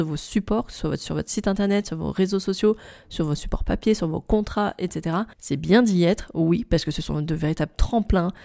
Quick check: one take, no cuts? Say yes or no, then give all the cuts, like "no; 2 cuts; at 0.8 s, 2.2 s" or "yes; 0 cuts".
no; 1 cut; at 5.3 s